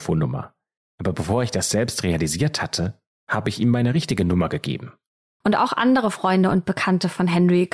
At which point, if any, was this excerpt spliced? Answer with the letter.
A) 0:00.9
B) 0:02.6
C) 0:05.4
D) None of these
C